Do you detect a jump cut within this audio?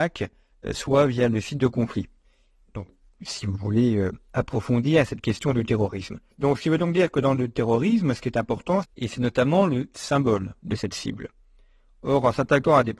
yes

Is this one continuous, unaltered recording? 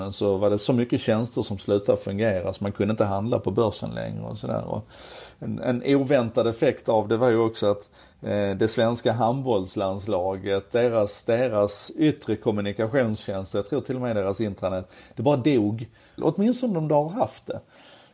no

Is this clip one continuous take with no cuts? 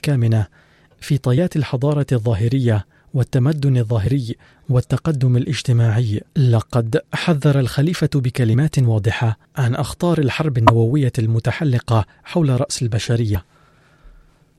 no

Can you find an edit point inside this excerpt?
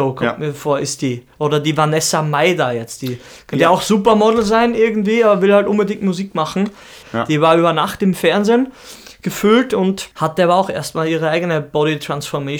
yes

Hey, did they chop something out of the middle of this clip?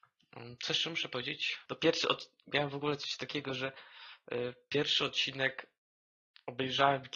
yes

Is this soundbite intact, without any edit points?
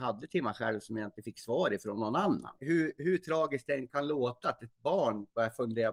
no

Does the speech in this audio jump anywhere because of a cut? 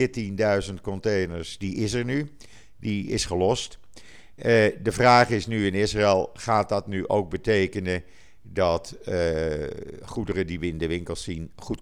no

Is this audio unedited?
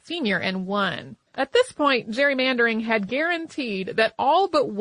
no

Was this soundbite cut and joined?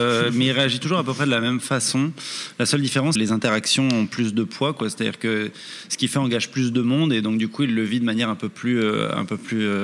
yes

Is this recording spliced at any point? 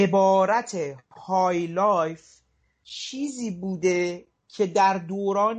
no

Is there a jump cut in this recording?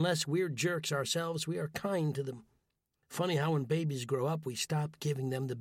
no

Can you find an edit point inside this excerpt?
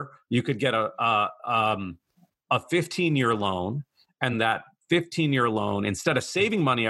yes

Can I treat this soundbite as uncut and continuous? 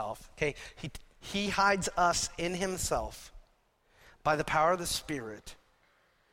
yes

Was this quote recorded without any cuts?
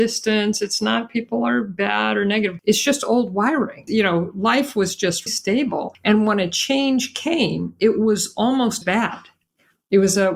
no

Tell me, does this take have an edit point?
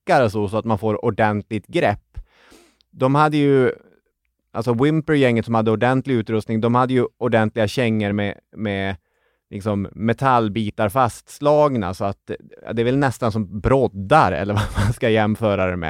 no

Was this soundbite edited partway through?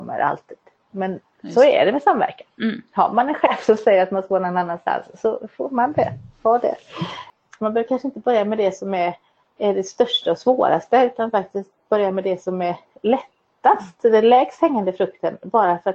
yes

